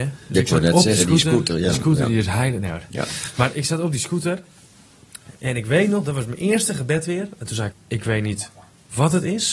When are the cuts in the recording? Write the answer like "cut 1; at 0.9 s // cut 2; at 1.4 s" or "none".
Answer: cut 1; at 7.7 s